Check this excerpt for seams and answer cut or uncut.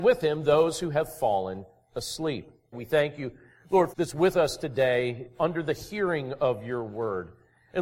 cut